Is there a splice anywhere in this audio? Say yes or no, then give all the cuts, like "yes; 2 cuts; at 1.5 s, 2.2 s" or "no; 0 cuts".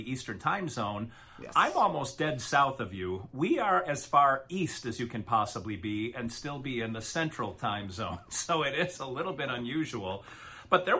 no; 0 cuts